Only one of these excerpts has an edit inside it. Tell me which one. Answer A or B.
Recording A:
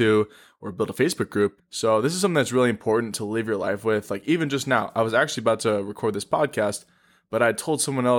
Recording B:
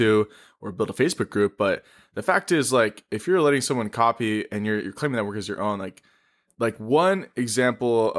A